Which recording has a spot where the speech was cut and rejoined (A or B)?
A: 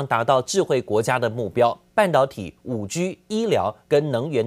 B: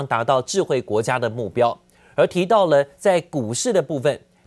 A